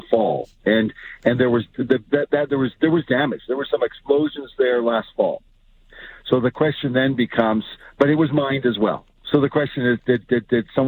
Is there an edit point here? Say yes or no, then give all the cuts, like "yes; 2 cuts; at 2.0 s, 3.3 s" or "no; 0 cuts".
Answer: no; 0 cuts